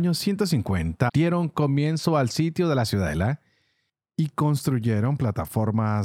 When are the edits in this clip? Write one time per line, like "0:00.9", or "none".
0:01.1